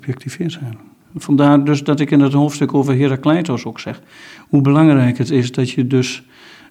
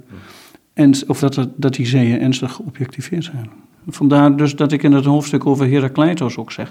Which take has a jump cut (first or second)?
second